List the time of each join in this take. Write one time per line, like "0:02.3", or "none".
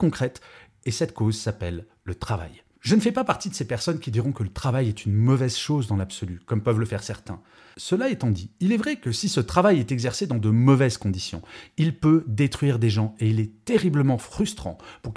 none